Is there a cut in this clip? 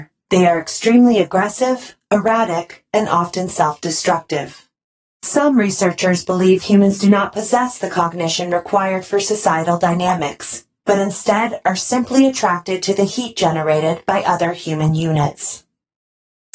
no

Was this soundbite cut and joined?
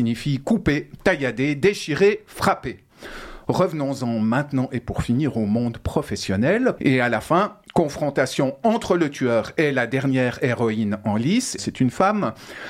yes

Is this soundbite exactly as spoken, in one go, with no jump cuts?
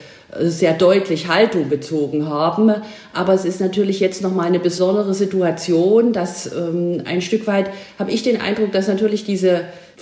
yes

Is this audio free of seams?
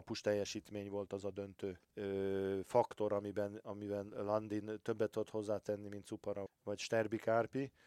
no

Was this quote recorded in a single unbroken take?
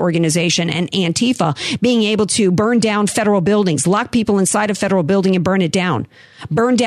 yes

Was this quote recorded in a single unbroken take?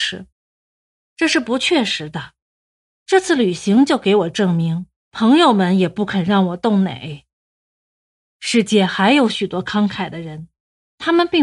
no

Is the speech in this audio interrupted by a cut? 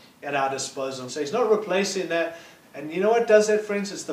yes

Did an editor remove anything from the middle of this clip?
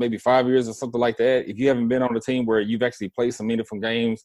no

